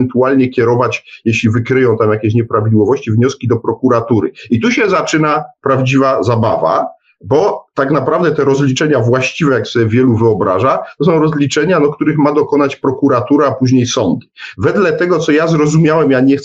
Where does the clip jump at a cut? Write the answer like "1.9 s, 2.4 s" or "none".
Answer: 14.5 s